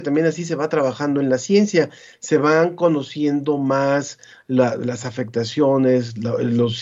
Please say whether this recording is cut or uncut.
uncut